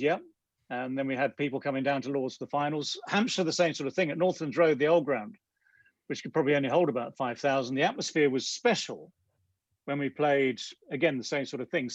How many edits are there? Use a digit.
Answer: 0